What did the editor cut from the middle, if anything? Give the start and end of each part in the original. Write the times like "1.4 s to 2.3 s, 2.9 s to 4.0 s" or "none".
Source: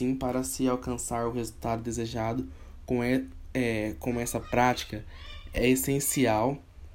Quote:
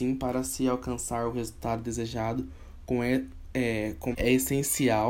4.1 s to 5.5 s